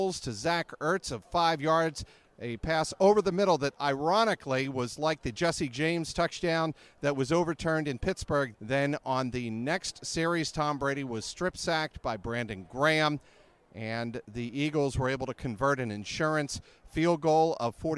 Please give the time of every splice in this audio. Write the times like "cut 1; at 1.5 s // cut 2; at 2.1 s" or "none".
cut 1; at 8.5 s